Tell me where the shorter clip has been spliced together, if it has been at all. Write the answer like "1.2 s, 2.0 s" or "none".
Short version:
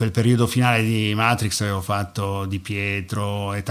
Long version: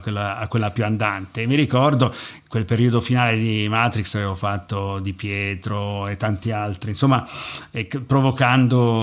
none